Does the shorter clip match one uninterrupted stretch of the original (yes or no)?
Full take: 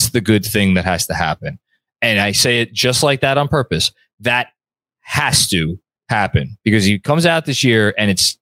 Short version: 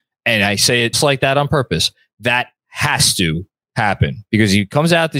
no